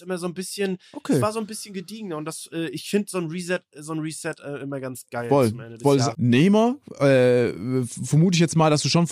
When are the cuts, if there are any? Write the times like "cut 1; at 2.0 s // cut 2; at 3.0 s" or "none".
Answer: cut 1; at 6.1 s